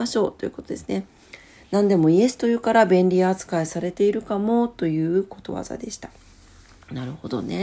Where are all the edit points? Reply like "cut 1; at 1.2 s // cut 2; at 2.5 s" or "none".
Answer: none